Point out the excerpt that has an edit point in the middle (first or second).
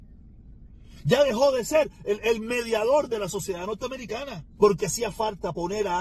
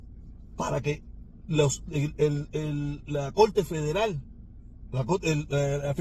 first